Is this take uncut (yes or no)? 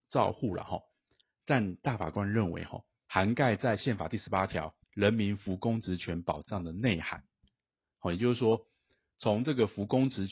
no